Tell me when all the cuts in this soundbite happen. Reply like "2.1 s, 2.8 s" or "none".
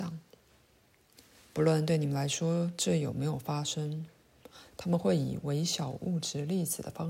none